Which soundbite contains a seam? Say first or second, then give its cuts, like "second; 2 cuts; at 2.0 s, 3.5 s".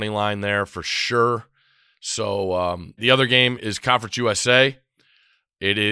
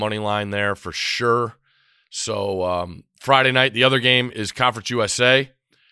first; 1 cut; at 3.0 s